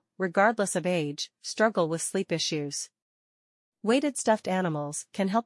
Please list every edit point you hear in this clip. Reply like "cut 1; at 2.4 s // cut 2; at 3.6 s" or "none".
none